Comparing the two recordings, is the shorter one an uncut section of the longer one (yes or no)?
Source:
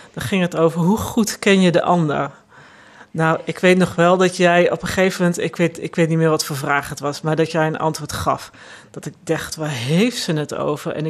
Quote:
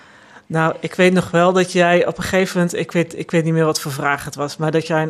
yes